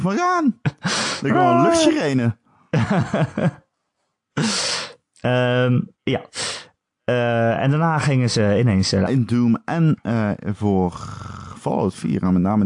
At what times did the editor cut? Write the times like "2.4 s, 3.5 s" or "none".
6.0 s, 9.1 s